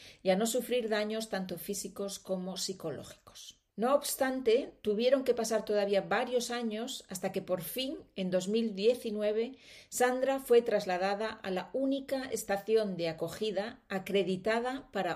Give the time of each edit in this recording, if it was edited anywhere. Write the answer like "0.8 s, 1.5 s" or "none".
3.7 s